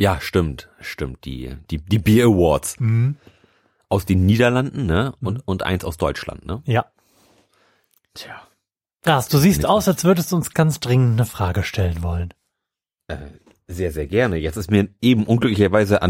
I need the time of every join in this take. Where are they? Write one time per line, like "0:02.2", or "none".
0:10.5